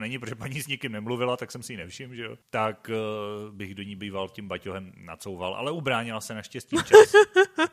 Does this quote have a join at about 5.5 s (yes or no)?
no